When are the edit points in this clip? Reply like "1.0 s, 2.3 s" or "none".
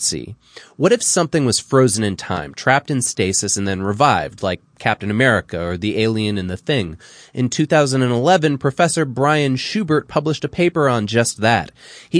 none